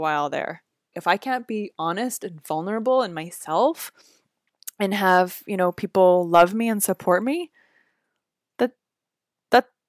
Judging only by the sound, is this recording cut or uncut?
cut